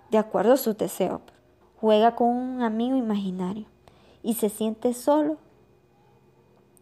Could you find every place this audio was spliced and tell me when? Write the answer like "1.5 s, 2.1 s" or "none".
1.6 s